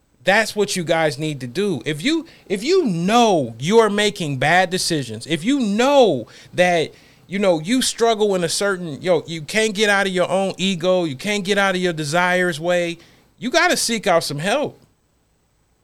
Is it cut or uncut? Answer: uncut